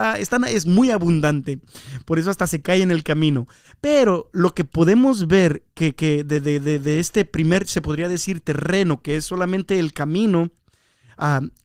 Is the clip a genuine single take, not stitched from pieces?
yes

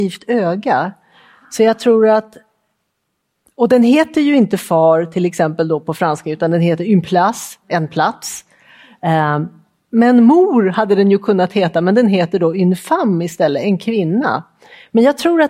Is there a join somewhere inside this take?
no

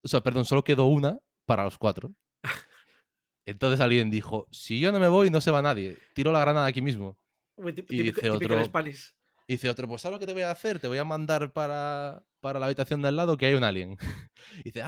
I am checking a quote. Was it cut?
no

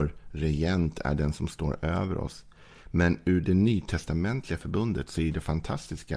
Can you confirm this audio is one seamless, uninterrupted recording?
yes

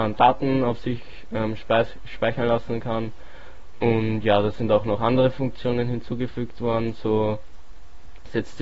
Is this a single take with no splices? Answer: yes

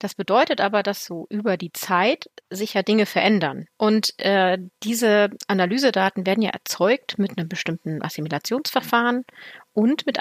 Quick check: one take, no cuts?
no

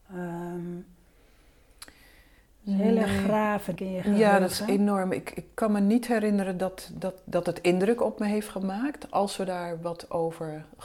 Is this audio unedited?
no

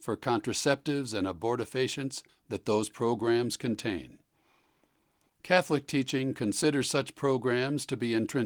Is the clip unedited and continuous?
no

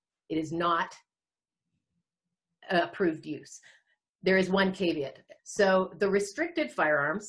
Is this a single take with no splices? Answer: no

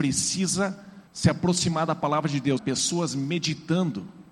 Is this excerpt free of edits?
no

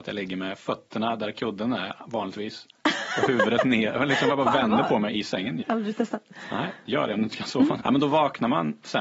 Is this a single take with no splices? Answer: no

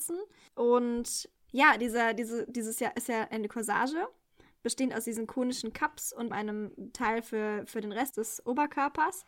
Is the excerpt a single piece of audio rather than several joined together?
no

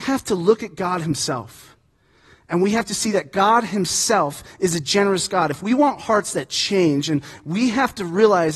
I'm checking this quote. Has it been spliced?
yes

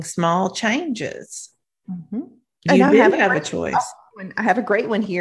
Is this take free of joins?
yes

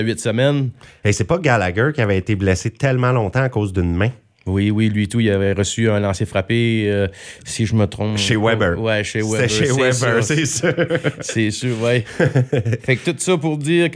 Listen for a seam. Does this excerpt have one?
no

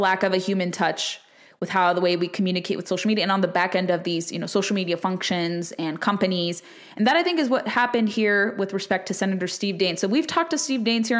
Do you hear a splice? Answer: no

